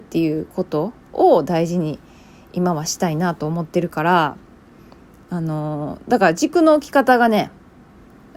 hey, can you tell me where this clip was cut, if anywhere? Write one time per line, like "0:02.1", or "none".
none